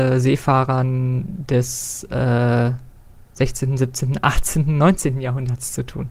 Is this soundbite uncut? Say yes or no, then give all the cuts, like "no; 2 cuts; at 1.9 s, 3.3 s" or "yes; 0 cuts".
yes; 0 cuts